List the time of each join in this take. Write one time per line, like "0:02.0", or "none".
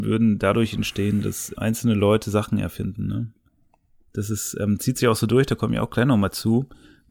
0:01.6